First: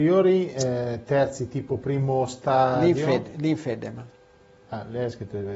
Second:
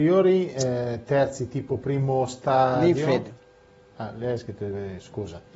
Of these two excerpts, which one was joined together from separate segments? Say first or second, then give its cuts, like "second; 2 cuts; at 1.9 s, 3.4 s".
second; 1 cut; at 3.3 s